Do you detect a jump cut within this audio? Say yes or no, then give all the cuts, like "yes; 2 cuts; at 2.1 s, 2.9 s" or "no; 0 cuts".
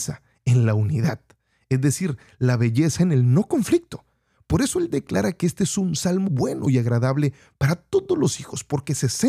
yes; 1 cut; at 6.3 s